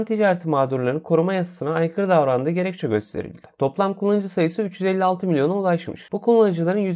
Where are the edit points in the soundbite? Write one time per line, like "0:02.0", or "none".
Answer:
0:03.6